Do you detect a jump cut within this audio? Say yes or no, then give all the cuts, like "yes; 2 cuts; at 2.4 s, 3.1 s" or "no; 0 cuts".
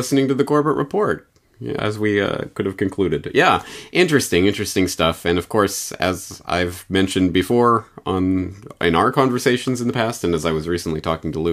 yes; 1 cut; at 1.8 s